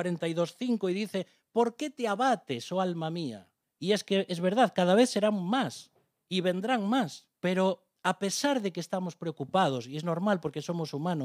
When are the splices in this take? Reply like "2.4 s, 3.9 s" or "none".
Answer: 3.6 s, 7.3 s